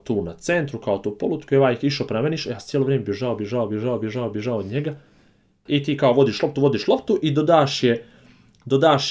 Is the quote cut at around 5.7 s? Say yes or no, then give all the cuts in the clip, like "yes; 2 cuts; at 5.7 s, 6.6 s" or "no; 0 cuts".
yes; 1 cut; at 5.7 s